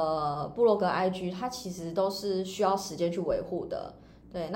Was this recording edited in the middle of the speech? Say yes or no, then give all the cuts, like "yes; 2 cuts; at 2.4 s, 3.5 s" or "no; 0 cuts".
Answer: no; 0 cuts